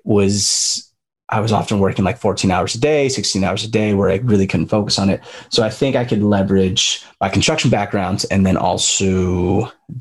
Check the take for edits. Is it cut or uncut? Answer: uncut